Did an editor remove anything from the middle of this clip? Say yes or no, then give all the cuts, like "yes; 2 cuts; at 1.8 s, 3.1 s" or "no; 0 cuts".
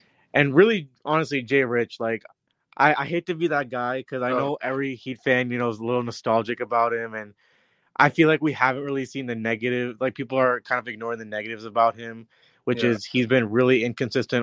no; 0 cuts